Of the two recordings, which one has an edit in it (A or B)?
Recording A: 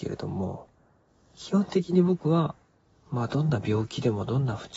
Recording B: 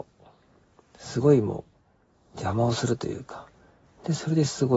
B